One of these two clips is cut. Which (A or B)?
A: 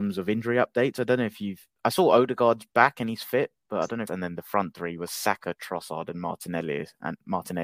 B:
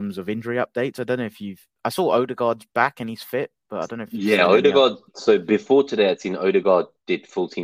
A